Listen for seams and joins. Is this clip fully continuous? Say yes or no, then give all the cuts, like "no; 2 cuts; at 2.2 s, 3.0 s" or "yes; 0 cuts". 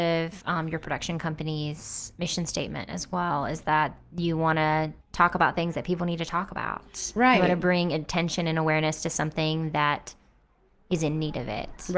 no; 1 cut; at 5.0 s